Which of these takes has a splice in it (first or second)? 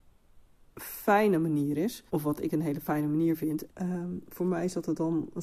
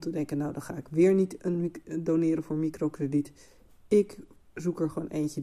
first